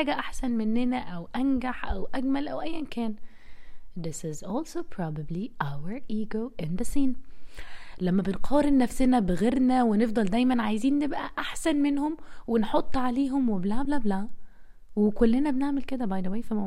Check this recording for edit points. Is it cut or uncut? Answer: uncut